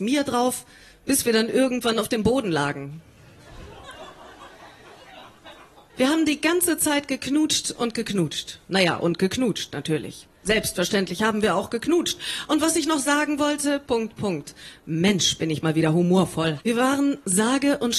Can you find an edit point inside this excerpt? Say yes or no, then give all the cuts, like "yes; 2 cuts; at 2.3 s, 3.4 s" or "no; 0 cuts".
yes; 3 cuts; at 5.9 s, 13.9 s, 16.6 s